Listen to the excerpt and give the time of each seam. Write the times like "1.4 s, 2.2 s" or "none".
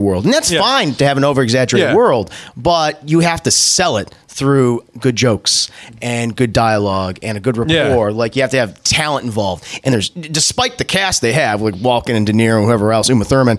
none